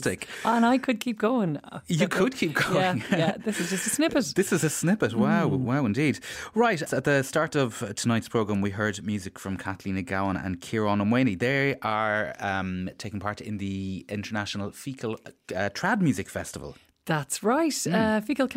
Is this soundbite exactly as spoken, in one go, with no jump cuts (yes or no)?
no